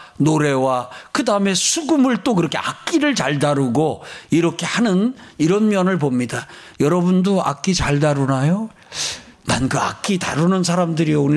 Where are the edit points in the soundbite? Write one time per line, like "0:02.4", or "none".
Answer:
none